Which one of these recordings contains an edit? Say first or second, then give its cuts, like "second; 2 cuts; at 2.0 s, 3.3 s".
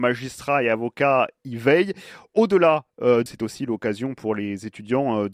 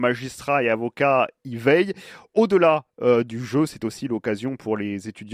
first; 1 cut; at 3.3 s